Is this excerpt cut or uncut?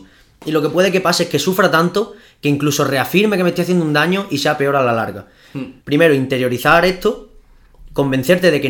cut